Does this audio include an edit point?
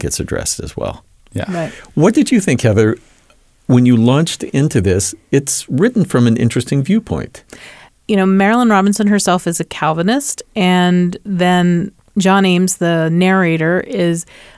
no; 0 cuts

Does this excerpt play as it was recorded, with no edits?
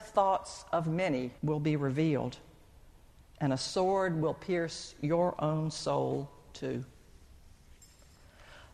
no; 1 cut; at 1.4 s

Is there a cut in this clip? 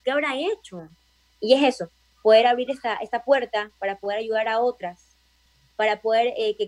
yes; 1 cut; at 1.3 s

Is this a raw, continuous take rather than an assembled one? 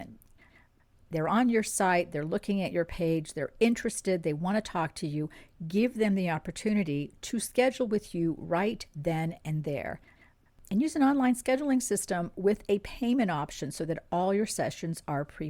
yes; 0 cuts

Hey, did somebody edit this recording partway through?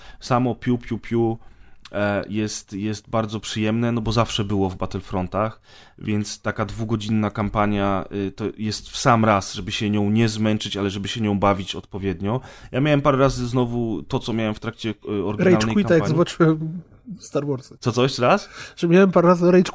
yes; 1 cut; at 17.8 s

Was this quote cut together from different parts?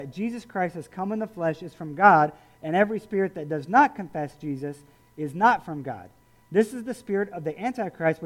no; 0 cuts

